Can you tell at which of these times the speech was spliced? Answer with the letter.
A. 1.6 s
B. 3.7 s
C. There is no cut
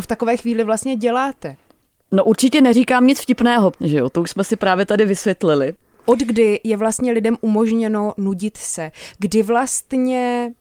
B